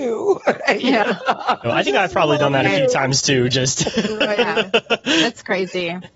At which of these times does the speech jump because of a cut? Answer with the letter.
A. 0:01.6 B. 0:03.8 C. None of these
A